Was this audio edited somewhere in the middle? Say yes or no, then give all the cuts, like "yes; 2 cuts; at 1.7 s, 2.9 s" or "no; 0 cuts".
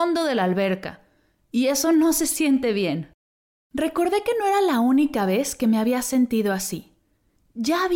no; 0 cuts